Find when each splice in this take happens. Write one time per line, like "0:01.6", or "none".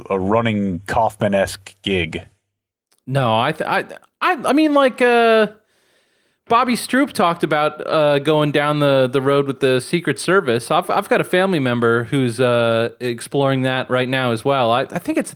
none